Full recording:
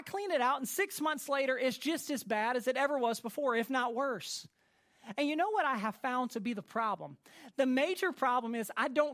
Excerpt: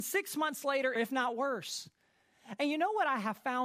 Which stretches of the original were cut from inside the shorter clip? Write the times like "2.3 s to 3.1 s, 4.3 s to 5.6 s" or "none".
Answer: 1.6 s to 3.5 s